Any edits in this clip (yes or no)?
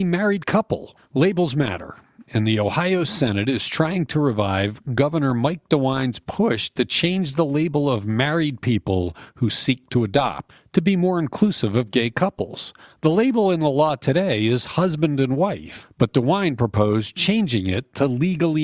no